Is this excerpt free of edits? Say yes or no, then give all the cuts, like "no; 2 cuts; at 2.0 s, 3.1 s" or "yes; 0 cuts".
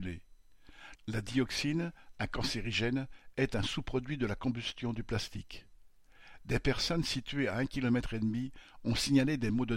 no; 1 cut; at 0.9 s